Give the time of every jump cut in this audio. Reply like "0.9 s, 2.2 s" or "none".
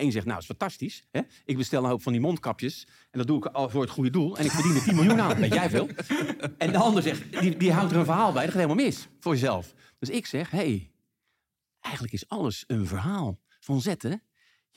none